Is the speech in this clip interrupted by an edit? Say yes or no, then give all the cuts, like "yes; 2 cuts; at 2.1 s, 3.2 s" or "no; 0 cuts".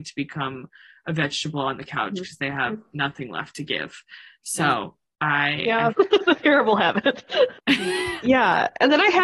yes; 2 cuts; at 5.9 s, 7.5 s